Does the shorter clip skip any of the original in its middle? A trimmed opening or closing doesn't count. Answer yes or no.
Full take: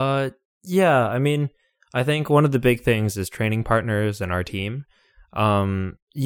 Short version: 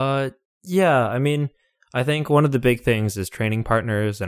no